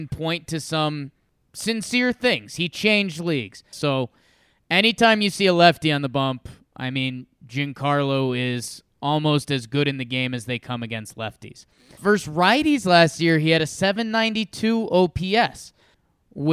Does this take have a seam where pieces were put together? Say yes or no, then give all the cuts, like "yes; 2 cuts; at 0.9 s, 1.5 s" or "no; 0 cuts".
yes; 1 cut; at 3.7 s